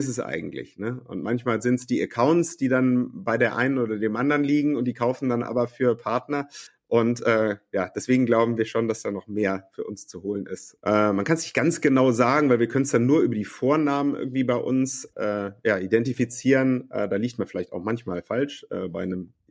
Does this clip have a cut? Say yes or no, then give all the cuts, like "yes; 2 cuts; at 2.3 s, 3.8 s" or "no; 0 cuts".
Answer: yes; 2 cuts; at 10.8 s, 15.1 s